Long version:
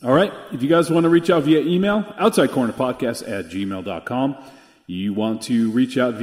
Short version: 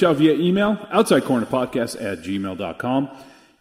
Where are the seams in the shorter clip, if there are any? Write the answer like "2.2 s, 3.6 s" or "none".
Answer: none